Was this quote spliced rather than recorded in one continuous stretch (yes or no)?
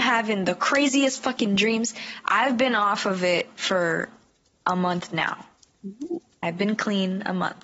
no